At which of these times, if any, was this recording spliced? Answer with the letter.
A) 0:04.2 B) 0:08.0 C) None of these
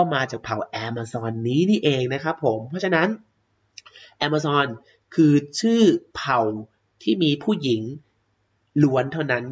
C